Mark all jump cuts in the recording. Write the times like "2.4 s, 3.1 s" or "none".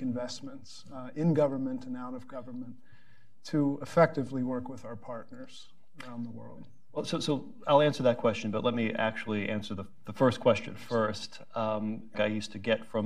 12.1 s